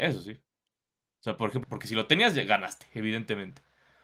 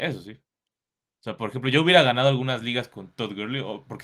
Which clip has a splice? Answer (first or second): first